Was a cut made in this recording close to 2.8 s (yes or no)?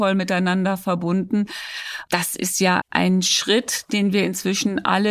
yes